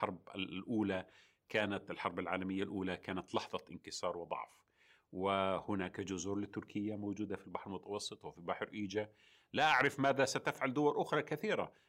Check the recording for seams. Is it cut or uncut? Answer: uncut